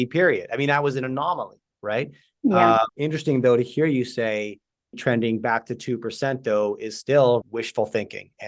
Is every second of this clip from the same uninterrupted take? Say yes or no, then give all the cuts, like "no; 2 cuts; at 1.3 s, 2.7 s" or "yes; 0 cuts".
no; 3 cuts; at 2.9 s, 4.9 s, 7.4 s